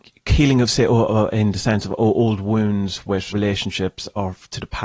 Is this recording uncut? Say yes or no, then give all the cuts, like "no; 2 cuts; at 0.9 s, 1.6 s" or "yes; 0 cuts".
no; 1 cut; at 3.3 s